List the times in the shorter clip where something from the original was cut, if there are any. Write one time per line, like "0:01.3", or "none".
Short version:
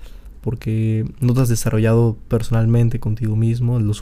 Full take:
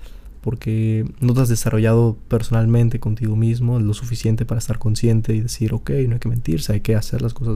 none